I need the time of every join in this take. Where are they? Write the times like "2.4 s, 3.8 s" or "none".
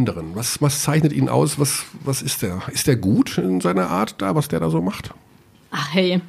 none

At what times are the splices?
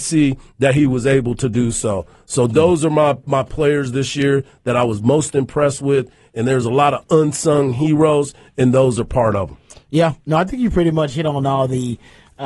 none

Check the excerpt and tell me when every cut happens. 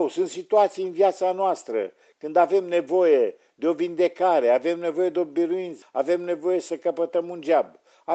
5.8 s

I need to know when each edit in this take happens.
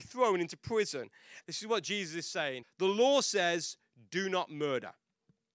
1.4 s, 2.6 s

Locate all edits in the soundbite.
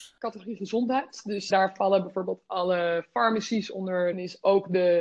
1.5 s, 4.1 s

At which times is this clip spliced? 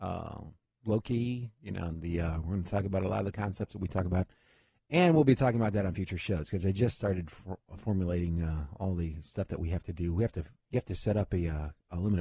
none

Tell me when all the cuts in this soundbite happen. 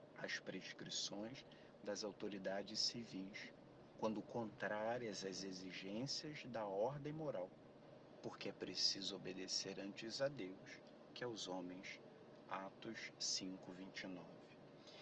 none

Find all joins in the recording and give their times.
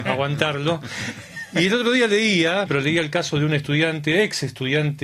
2.7 s

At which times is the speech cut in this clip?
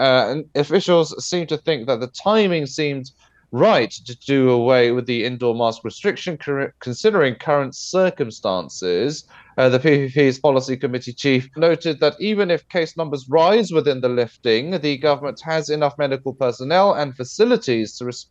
11.6 s

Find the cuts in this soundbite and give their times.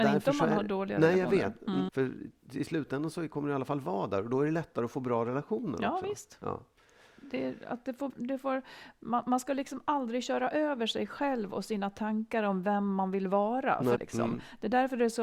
1.9 s, 8.1 s, 14.0 s

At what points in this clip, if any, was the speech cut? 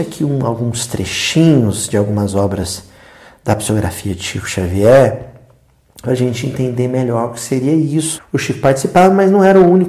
8.2 s

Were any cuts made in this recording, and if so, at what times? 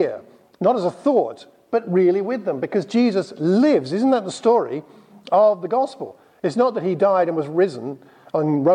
none

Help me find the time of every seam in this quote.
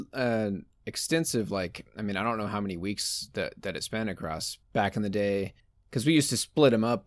4.6 s

